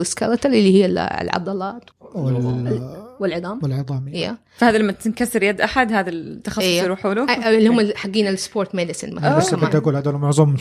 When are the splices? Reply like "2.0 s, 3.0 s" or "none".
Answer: 1.9 s

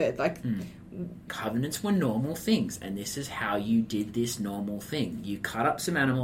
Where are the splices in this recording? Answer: 1.3 s

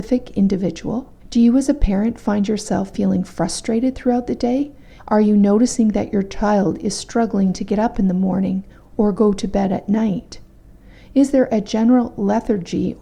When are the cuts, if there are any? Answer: 1.2 s, 5.0 s

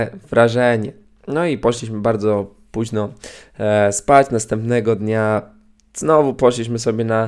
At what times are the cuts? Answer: none

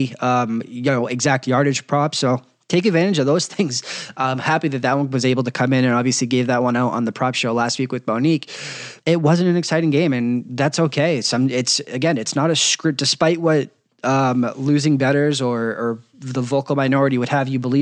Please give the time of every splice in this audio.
9.0 s

